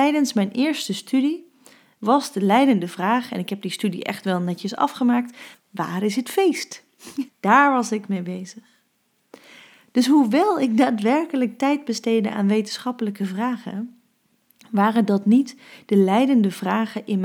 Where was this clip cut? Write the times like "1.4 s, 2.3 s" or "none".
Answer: 5.5 s, 7.3 s